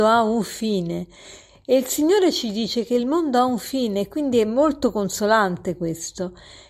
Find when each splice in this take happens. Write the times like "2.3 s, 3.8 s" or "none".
none